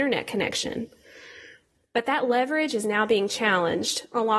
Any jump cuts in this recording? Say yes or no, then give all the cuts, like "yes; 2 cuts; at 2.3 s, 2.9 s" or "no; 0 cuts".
no; 0 cuts